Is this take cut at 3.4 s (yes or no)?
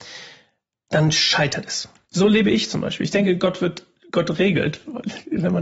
no